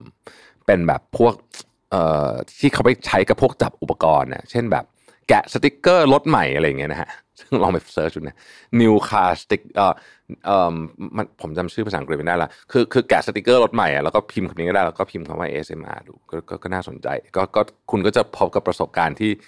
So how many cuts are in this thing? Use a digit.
1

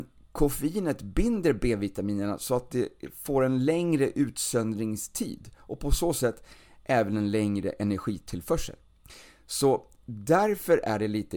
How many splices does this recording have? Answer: 0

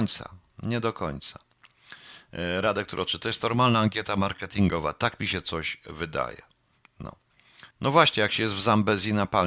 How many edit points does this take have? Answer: 1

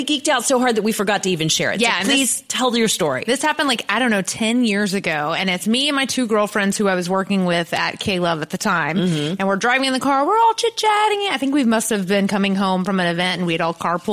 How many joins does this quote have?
0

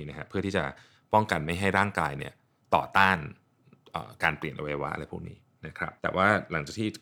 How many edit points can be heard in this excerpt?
1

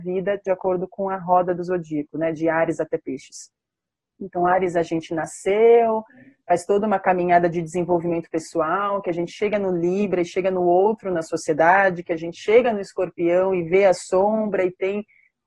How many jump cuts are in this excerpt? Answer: 0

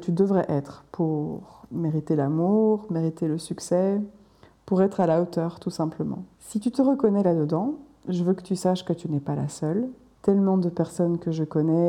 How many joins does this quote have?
2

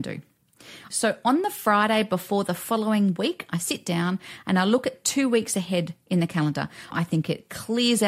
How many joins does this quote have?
2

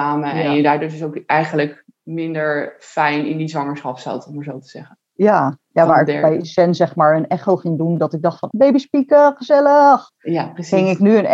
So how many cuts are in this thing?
1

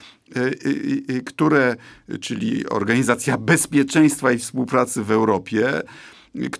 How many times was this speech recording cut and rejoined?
0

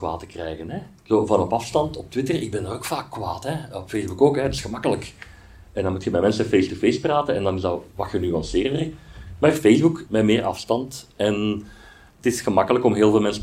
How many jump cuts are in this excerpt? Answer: 1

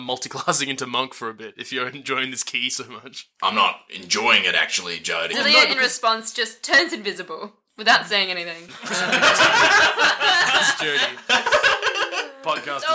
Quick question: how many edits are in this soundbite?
2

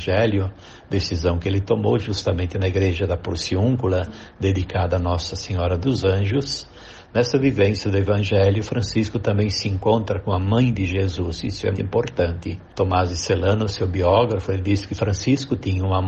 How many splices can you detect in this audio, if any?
1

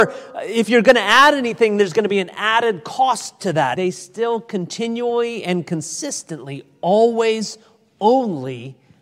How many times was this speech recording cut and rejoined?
1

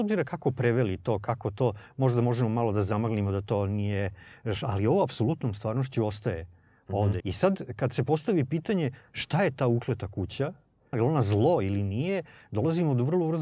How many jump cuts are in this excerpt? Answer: 2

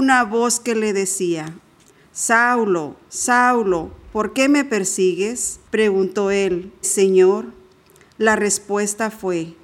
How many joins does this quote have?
2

